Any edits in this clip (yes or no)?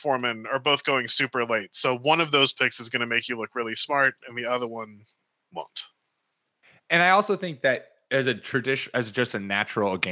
no